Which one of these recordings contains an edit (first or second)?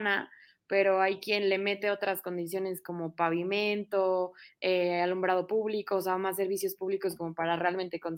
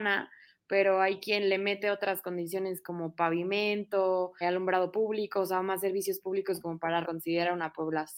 second